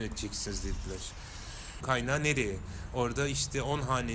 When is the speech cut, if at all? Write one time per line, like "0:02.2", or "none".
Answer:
0:01.8